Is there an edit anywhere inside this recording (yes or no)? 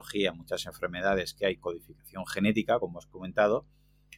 no